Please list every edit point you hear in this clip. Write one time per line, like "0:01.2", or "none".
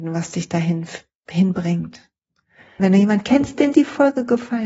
0:02.8